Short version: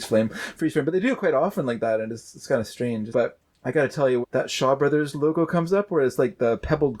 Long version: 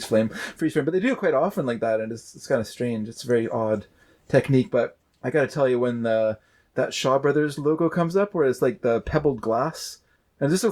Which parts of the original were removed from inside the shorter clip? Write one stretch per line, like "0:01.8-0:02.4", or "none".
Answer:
0:03.1-0:04.7
0:05.8-0:06.6